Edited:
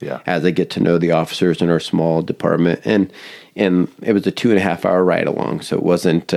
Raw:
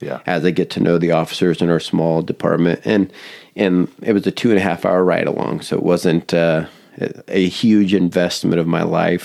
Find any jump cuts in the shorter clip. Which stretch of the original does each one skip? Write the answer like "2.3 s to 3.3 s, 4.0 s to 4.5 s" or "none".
none